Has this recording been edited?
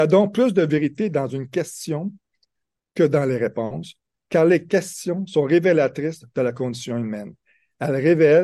no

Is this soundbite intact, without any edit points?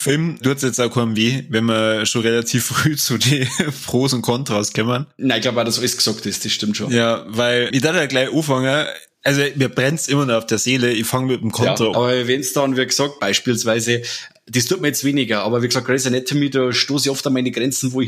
no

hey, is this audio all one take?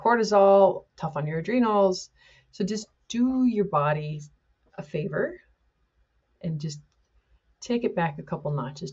yes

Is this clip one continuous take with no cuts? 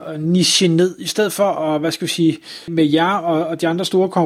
no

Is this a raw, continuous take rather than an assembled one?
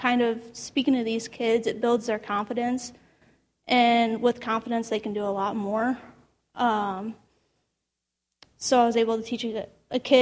yes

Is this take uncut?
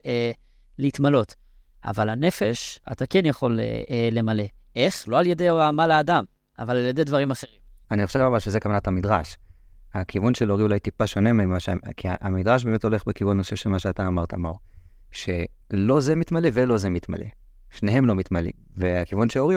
no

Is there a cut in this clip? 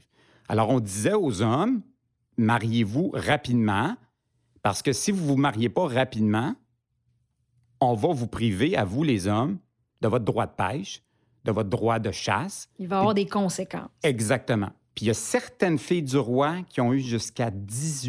no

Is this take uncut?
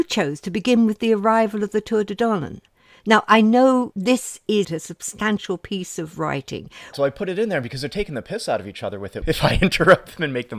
no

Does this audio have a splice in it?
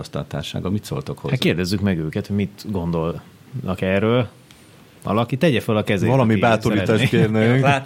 no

